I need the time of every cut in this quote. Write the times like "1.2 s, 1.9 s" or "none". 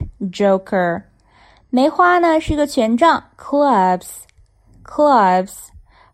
none